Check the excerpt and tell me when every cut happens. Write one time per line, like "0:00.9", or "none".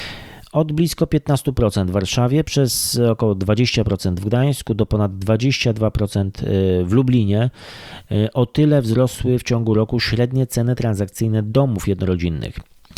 none